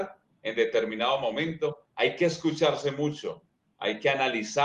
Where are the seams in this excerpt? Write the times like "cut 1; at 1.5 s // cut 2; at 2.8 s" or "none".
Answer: none